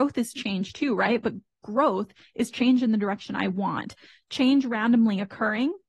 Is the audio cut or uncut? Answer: uncut